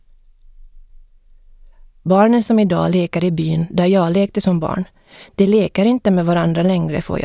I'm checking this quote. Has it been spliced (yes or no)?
no